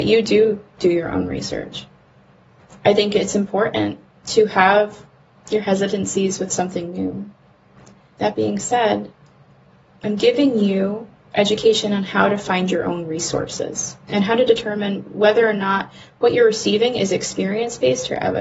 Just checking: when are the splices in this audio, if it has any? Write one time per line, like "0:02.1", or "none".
0:08.2
0:14.1